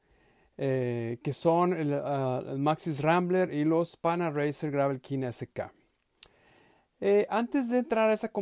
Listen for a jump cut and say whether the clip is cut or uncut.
uncut